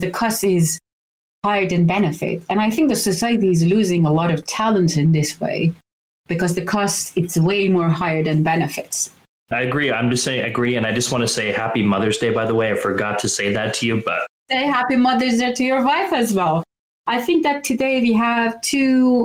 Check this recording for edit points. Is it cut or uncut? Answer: uncut